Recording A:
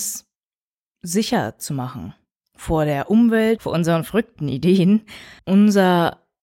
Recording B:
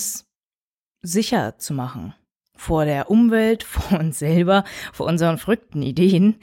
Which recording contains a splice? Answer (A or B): A